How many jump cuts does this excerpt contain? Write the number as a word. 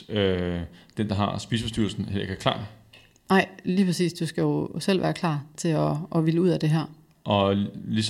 zero